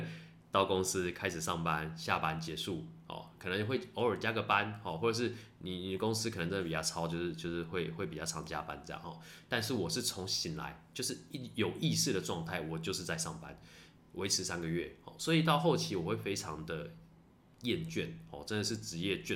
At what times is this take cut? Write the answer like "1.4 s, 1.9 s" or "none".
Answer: none